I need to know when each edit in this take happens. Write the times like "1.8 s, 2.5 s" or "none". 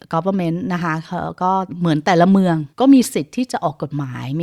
2.7 s